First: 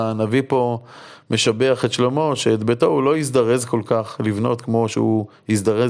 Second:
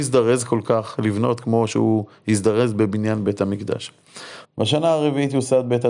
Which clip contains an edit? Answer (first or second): second